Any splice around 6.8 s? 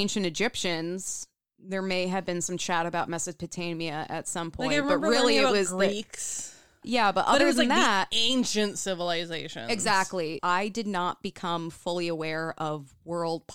yes; 2 cuts; at 6.8 s, 10.4 s

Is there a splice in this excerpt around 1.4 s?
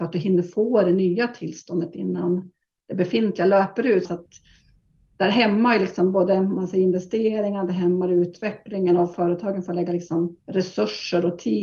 no; 1 cut; at 4.1 s

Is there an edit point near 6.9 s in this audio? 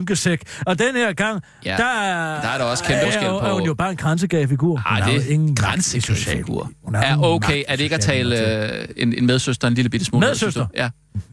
no; 1 cut; at 3.0 s

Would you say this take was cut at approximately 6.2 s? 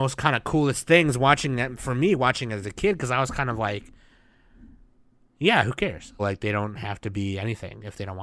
yes; 1 cut; at 6.2 s

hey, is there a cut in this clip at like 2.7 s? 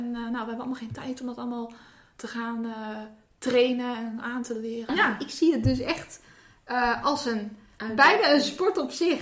no; 1 cut; at 4.9 s

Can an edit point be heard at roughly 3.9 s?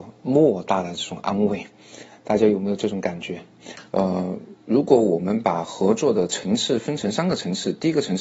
yes; 1 cut; at 3.9 s

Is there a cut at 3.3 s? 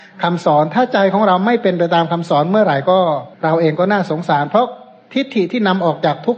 yes; 1 cut; at 3.3 s

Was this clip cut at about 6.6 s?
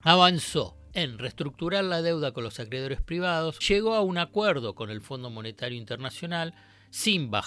no; 1 cut; at 3.6 s

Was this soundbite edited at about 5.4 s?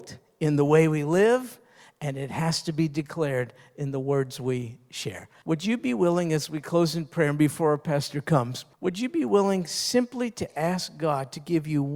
yes; 2 cuts; at 5.4 s, 8.7 s

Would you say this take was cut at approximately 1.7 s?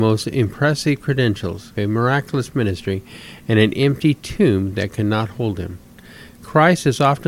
yes; 1 cut; at 1.7 s

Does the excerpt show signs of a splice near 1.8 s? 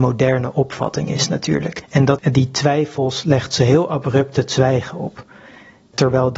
yes; 1 cut; at 1.8 s

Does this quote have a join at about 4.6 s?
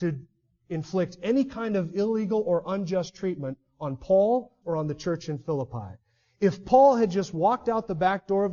yes; 1 cut; at 4.6 s

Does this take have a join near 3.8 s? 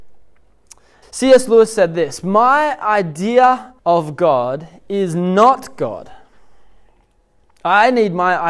yes; 2 cuts; at 1.0 s, 3.8 s

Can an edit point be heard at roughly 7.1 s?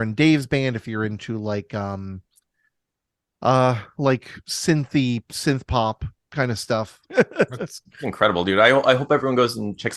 yes; 1 cut; at 7.1 s

